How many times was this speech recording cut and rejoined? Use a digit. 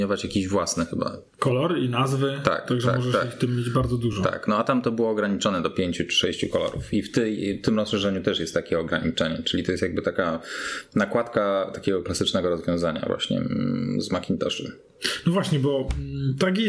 0